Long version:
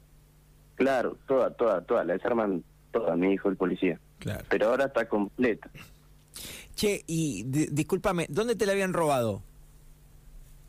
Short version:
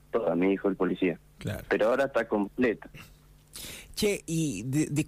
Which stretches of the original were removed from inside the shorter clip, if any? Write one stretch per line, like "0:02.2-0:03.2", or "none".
none